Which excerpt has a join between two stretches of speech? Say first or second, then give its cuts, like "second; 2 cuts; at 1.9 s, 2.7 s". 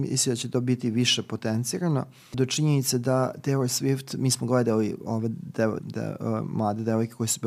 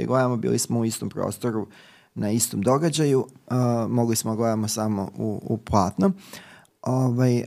first; 2 cuts; at 2.3 s, 5.8 s